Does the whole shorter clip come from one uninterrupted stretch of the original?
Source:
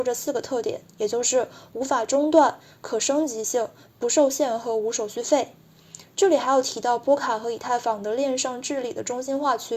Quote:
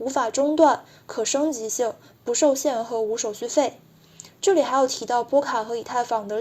yes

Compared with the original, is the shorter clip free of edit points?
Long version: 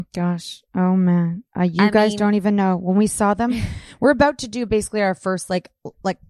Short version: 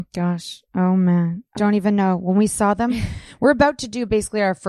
no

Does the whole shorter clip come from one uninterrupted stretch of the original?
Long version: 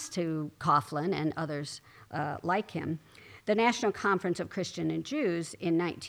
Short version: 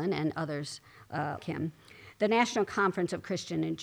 no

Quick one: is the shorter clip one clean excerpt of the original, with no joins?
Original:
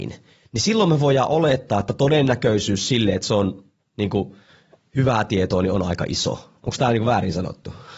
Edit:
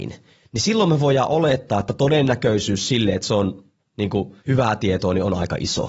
no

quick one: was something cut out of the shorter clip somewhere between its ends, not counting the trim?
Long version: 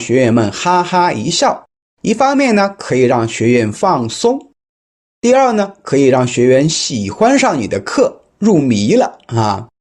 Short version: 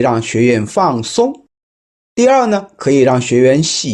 no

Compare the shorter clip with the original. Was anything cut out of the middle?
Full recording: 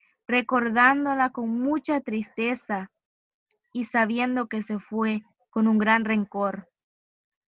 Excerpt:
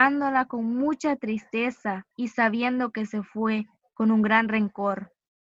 yes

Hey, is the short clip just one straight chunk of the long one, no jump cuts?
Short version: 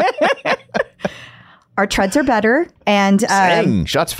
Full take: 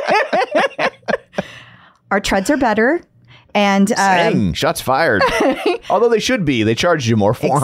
no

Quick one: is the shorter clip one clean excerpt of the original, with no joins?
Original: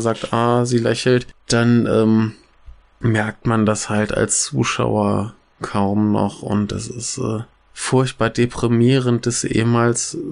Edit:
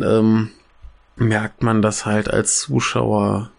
yes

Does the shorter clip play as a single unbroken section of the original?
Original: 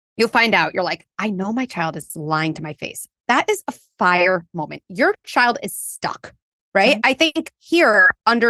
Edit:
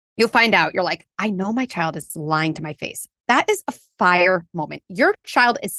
yes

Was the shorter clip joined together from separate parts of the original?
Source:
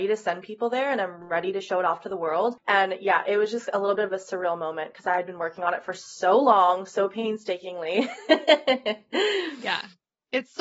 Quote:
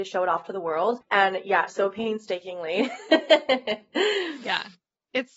yes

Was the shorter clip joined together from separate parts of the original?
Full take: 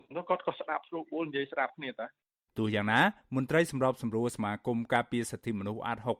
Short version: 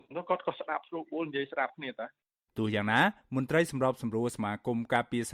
no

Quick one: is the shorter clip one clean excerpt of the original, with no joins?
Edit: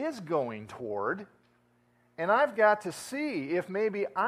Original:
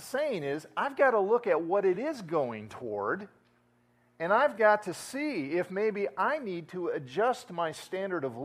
yes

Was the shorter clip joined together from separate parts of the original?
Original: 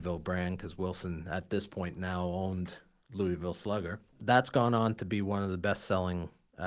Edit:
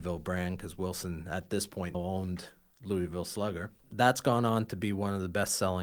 yes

